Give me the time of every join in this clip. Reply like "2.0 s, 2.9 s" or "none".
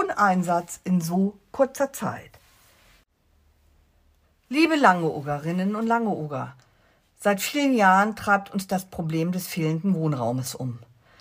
none